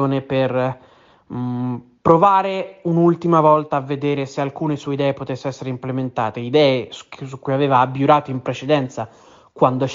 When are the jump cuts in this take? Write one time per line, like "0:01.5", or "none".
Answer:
none